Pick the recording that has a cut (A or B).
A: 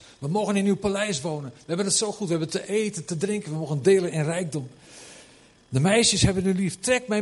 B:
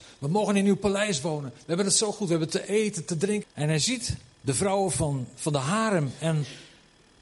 B